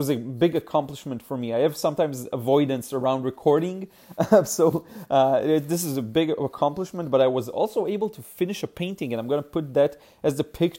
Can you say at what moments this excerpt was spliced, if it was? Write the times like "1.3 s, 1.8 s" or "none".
none